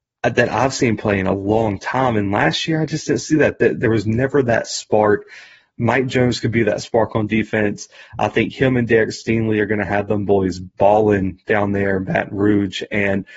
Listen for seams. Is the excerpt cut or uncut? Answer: uncut